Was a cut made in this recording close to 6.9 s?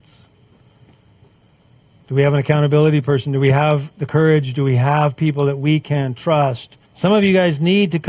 yes; 1 cut; at 6.9 s

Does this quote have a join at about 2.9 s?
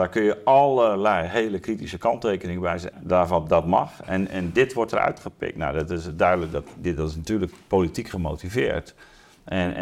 yes; 1 cut; at 2.9 s

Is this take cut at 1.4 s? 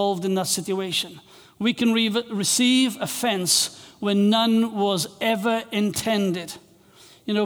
no; 0 cuts

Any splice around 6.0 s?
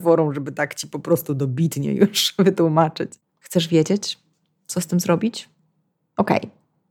no; 1 cut; at 3.2 s

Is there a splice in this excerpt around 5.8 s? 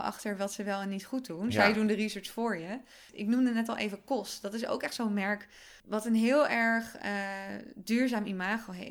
yes; 1 cut; at 5.8 s

